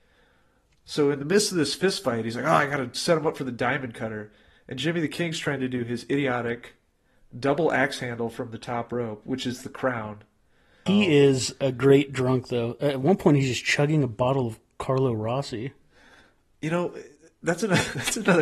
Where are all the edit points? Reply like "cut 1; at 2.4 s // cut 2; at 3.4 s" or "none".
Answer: cut 1; at 10.9 s